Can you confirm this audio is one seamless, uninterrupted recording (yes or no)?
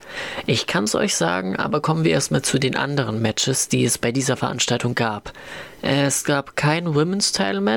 yes